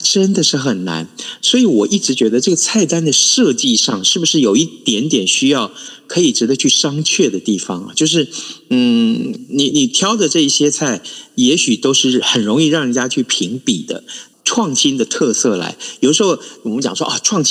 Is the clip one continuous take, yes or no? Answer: no